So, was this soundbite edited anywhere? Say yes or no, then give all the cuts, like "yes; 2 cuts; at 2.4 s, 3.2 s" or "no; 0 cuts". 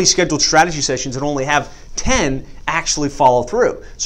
no; 0 cuts